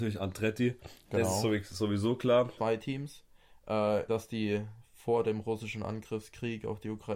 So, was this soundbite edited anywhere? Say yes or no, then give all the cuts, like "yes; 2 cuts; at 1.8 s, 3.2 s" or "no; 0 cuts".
yes; 2 cuts; at 2.6 s, 4.1 s